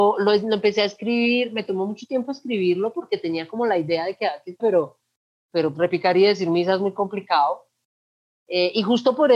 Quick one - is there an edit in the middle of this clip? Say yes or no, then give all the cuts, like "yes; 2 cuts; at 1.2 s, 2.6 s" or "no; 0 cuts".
yes; 2 cuts; at 4.6 s, 5.7 s